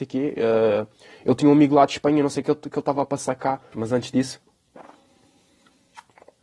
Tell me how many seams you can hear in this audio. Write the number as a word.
one